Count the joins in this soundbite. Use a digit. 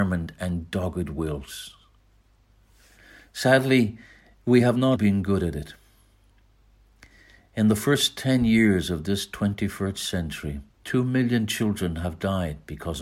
2